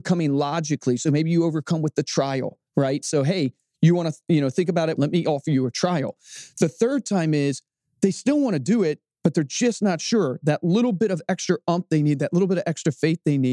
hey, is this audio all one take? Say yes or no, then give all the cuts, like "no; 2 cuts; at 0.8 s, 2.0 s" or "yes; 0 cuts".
no; 1 cut; at 5.0 s